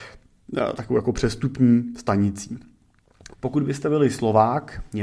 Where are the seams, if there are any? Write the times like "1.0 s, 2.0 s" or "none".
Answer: 3.3 s